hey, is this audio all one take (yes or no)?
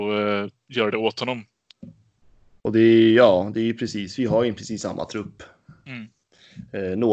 yes